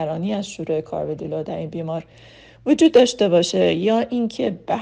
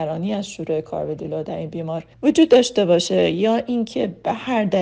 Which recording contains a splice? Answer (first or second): second